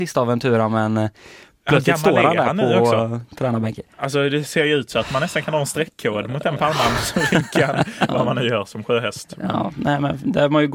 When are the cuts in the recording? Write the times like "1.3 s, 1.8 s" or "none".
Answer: 3.9 s, 8.1 s